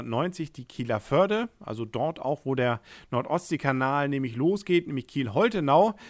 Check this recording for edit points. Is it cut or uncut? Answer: uncut